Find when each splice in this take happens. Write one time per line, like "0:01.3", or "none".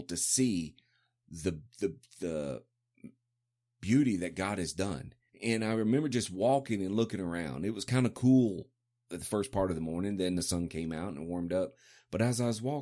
0:05.3

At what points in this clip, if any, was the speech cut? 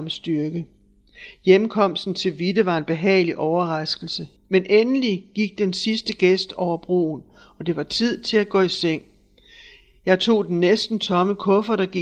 0:04.3

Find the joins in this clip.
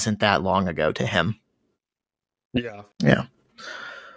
0:02.9

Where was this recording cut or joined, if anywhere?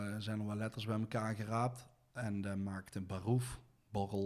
none

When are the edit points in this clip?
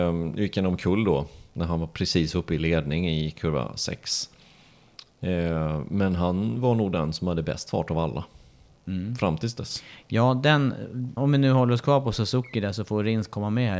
0:11.2

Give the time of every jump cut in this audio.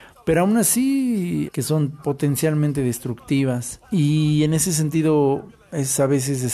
0:01.5
0:03.8

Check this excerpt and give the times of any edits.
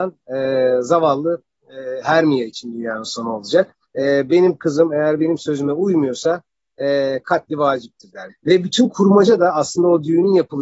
0:03.8
0:08.3

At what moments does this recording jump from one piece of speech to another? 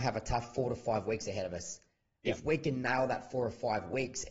0:02.2

